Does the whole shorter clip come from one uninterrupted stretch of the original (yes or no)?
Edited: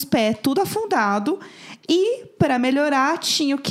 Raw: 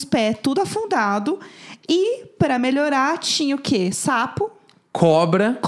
yes